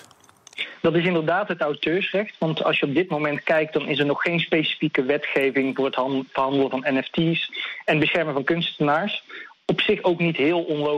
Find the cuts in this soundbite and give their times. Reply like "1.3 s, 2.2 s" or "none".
none